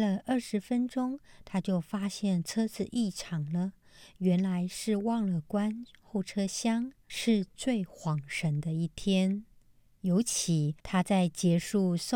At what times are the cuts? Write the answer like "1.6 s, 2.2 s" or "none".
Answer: 7.1 s, 10.8 s